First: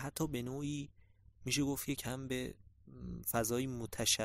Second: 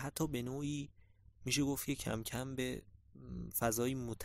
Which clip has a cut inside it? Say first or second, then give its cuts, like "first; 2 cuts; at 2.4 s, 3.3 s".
first; 1 cut; at 2.0 s